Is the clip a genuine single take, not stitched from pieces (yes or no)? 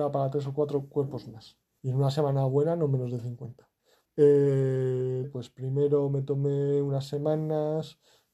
no